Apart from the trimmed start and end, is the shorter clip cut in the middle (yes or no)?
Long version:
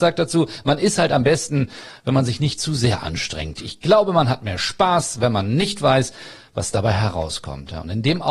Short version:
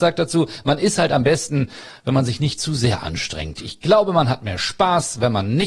no